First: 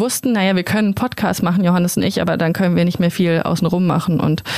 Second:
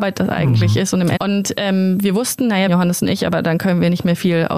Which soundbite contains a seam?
second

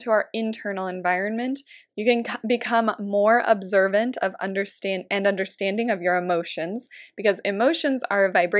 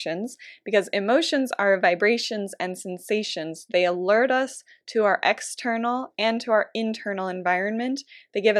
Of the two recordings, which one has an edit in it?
first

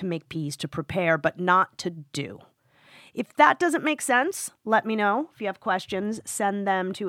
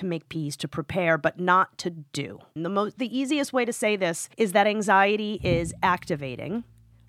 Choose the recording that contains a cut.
second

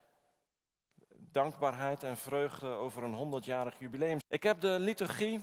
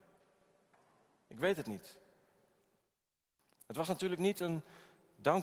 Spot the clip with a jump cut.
first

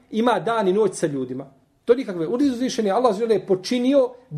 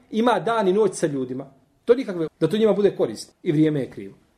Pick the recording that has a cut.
second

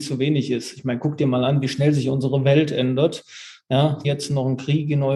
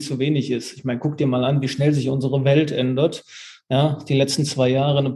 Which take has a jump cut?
first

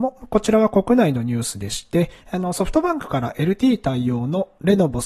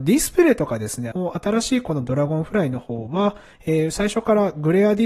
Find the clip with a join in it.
second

